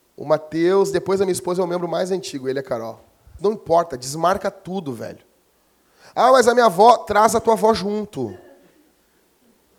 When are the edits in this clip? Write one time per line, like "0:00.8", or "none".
0:03.4